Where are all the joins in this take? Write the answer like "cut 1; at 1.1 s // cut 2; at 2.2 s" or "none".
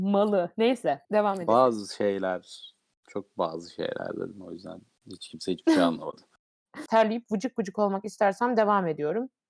cut 1; at 1.0 s // cut 2; at 6.9 s